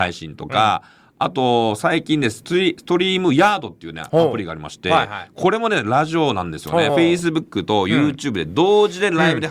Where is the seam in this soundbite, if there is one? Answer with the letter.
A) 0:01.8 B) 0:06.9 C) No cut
C